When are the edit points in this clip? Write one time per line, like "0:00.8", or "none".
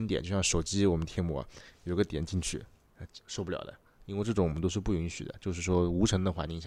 0:03.2

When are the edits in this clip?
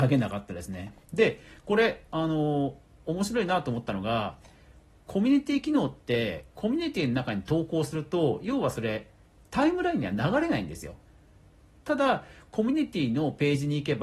0:01.0

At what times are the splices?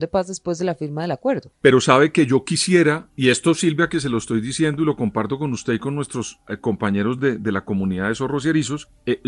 none

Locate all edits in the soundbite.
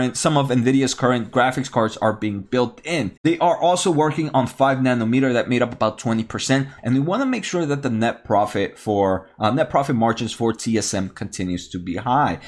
0:03.2
0:06.8

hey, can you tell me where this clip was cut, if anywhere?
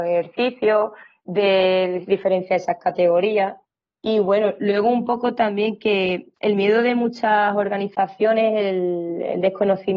none

